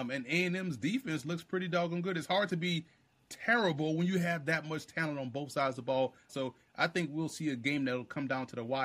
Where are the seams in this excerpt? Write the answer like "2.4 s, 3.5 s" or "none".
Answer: 6.3 s